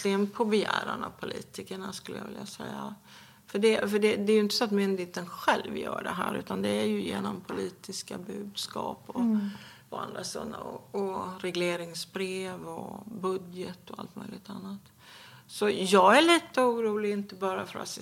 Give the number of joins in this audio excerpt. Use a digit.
0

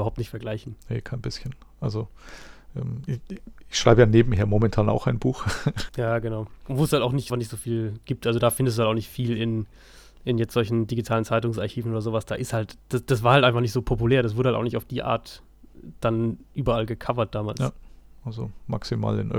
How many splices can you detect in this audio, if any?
2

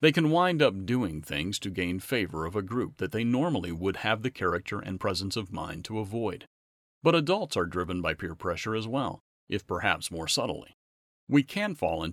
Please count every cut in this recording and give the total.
0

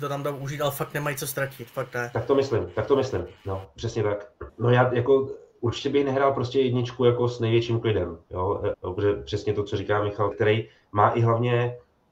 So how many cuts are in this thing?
3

